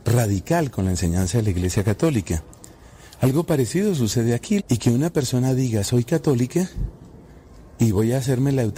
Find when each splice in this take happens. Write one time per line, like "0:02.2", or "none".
0:04.6